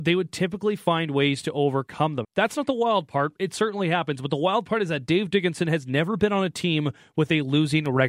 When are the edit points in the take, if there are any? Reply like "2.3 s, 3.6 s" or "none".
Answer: 2.2 s

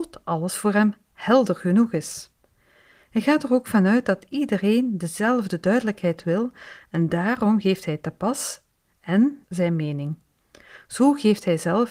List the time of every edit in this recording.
9.4 s

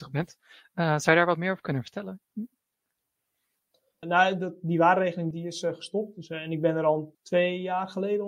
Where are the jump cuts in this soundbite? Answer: 4.0 s, 5.3 s, 7.1 s

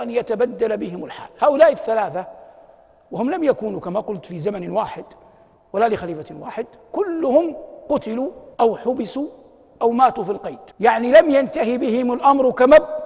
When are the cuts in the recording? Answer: 8.5 s, 10.7 s

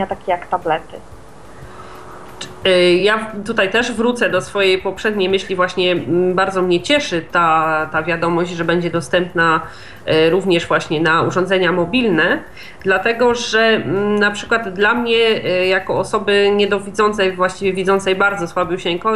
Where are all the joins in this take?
none

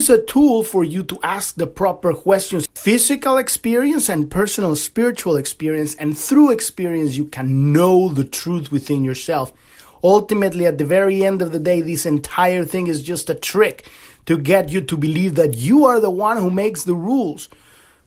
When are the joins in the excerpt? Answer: 2.7 s

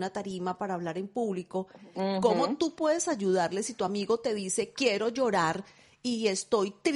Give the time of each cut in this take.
1.9 s

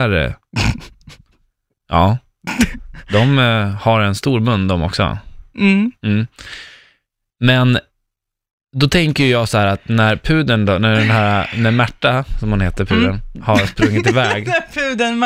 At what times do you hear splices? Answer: none

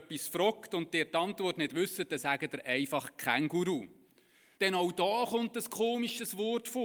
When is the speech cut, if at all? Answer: 4.5 s

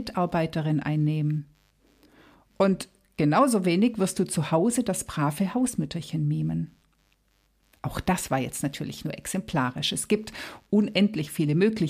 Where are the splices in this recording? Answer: none

